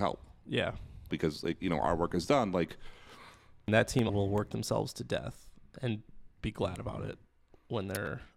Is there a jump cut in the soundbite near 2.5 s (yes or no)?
no